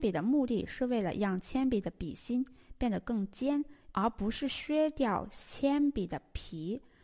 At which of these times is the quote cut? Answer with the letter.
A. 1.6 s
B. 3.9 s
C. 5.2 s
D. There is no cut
B